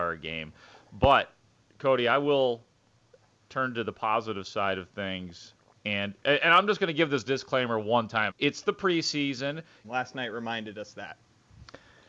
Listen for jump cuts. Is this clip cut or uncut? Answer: cut